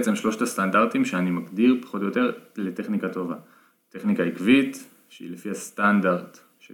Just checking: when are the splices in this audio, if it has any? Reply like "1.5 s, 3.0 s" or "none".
none